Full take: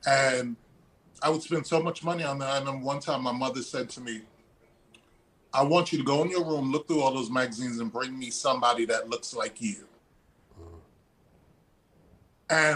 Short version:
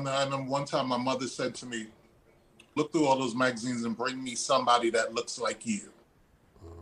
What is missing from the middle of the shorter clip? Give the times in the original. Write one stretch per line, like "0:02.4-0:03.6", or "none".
0:05.1-0:06.7